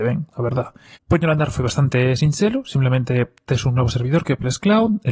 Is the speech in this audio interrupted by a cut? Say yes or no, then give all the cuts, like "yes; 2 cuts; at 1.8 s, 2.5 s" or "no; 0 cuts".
yes; 1 cut; at 1.0 s